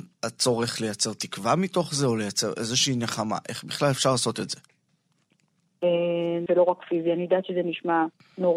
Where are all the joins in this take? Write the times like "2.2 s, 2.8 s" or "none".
6.5 s